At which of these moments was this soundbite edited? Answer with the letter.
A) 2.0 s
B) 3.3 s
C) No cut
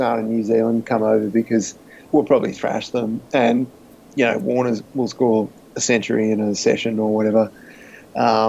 A